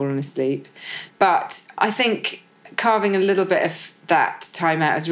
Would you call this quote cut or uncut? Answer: uncut